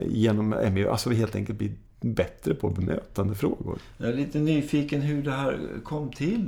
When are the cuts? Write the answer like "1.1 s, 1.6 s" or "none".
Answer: none